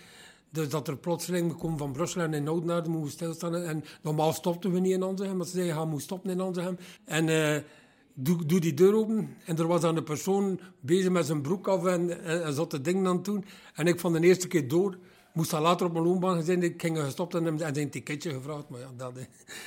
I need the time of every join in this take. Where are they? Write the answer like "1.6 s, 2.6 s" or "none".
7.0 s